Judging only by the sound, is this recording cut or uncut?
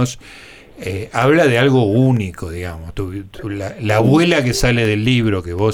uncut